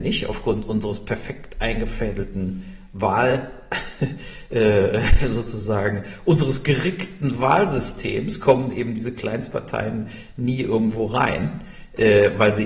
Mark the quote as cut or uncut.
uncut